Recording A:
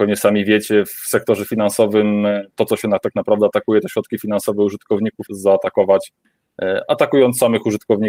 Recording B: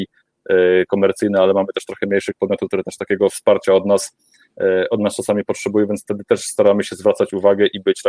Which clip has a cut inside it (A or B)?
A